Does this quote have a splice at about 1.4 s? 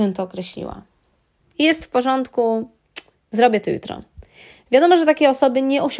yes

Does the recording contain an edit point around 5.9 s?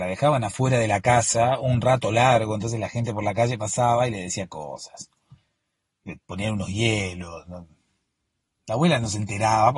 yes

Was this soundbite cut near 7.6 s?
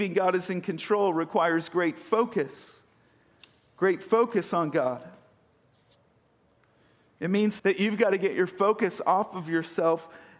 yes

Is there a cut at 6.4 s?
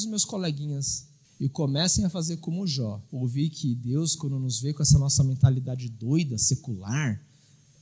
no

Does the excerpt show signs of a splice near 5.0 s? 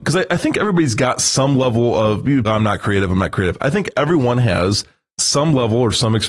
no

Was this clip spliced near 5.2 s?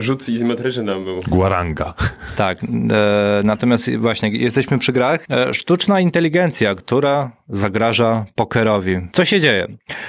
yes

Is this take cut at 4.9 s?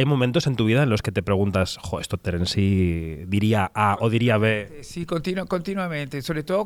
no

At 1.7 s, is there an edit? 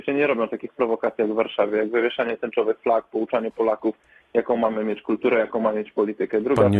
no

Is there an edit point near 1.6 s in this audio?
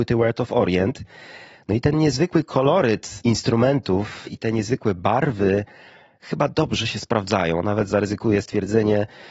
no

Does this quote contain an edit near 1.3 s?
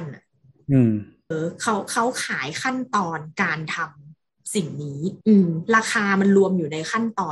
yes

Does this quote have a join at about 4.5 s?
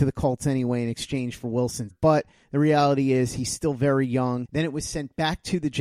yes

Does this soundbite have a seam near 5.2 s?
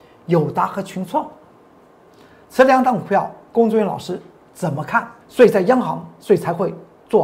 yes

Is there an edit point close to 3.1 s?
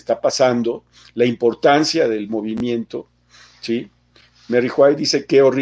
no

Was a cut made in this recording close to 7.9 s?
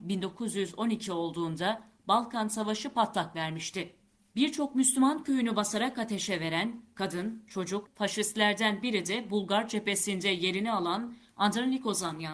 yes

